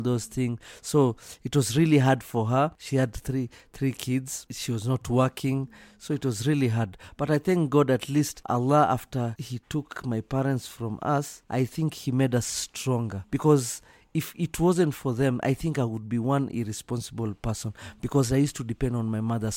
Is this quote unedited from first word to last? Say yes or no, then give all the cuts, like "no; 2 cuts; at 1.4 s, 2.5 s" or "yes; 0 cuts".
yes; 0 cuts